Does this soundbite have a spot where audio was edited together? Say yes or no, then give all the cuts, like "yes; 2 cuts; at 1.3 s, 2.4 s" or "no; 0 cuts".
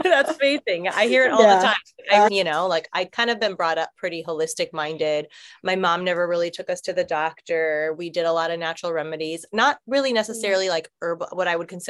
yes; 1 cut; at 2.3 s